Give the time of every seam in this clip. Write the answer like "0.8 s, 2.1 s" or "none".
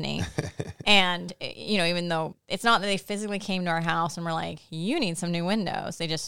2.3 s